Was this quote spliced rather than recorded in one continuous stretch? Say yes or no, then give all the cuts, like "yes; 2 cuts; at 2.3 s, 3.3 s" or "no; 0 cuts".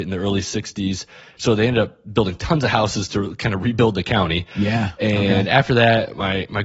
yes; 1 cut; at 1.4 s